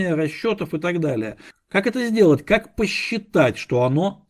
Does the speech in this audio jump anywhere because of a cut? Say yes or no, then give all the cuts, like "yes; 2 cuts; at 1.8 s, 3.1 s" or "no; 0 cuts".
yes; 1 cut; at 1.5 s